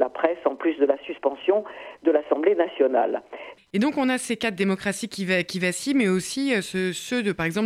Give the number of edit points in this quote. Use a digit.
1